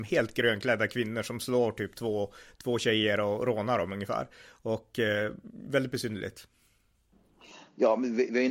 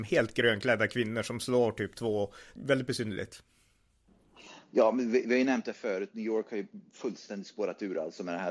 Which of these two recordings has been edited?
second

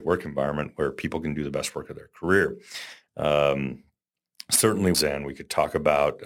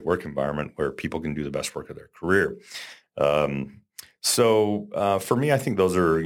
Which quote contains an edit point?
first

